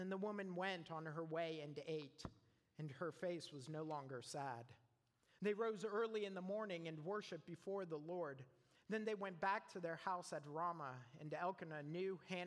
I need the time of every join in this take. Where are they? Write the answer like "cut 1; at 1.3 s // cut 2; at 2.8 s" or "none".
none